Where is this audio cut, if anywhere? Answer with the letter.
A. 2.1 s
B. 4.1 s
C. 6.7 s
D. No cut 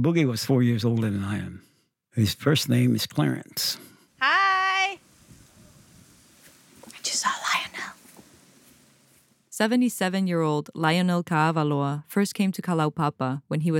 B